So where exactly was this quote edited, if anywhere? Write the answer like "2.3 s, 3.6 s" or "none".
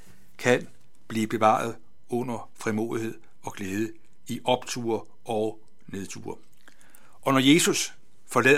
none

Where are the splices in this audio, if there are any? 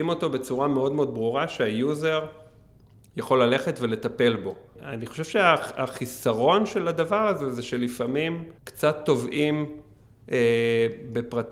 4.8 s, 8.6 s

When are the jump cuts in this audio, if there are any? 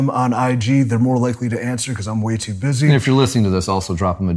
none

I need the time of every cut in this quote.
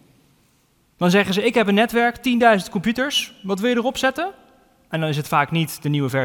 none

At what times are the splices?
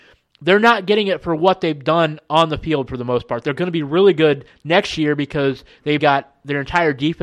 3.4 s, 6.0 s

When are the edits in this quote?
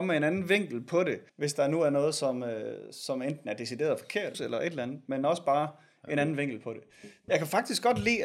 1.3 s, 4.3 s, 7.3 s

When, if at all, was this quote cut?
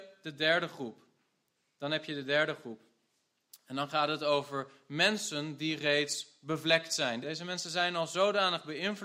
7.2 s

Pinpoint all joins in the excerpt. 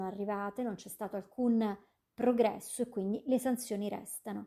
none

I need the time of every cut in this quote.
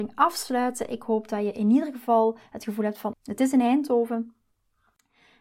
3.1 s

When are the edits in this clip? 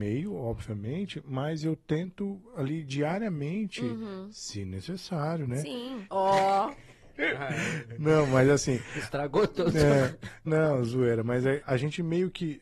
6.1 s, 10.5 s, 11.6 s

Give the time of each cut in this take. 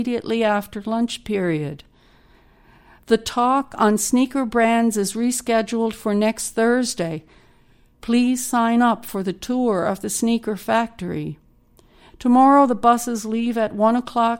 none

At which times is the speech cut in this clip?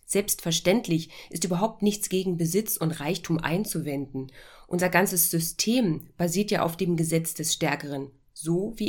none

